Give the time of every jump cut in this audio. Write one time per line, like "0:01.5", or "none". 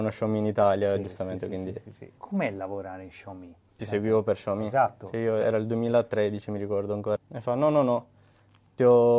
0:03.8
0:07.2